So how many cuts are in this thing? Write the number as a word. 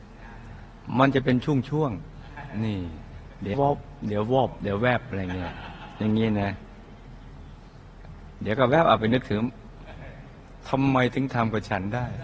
one